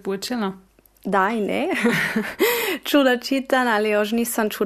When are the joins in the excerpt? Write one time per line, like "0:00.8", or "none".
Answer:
none